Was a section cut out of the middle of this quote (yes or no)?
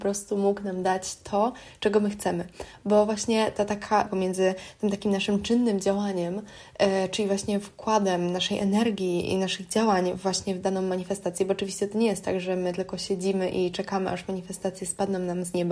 yes